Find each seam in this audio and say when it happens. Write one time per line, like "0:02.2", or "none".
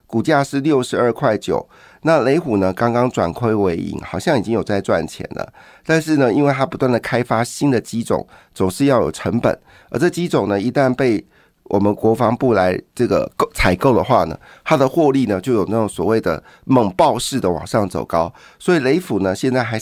none